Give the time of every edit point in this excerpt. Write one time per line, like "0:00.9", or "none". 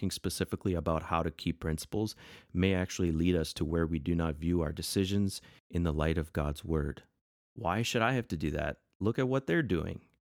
0:07.4